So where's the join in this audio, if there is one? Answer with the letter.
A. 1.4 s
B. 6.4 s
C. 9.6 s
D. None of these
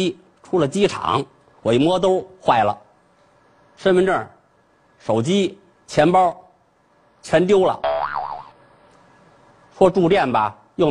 D